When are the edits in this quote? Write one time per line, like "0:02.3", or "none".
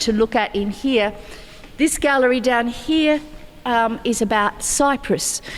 none